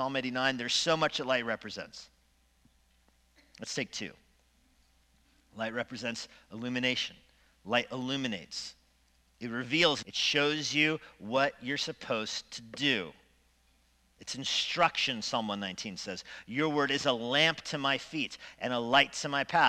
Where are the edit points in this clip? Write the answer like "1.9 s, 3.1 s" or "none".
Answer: 10.0 s